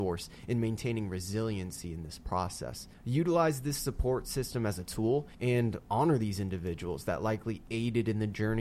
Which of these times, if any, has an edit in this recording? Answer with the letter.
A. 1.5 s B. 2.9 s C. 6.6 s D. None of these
B